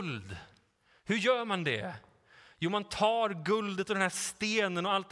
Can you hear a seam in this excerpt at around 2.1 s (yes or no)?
no